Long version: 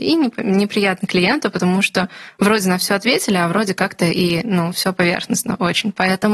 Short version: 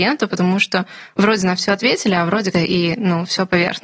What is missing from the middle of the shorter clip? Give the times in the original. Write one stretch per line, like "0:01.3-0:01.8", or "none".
0:03.7-0:04.0